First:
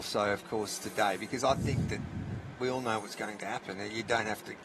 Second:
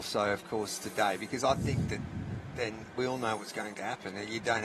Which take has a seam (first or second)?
first